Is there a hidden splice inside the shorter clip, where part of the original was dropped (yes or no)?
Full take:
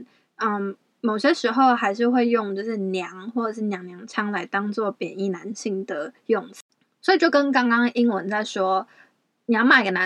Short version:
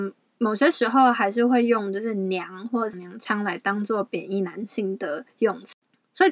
yes